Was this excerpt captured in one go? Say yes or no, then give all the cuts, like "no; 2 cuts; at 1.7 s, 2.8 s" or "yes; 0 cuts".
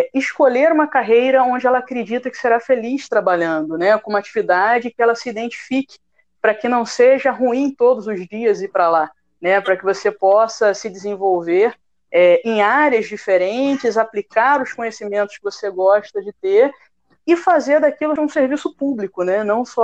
no; 1 cut; at 18.2 s